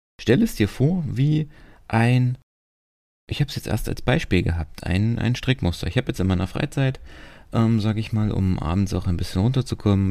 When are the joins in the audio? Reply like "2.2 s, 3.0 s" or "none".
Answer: none